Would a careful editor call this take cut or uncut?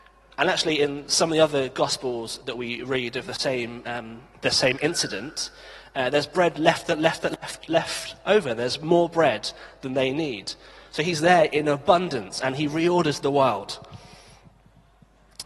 uncut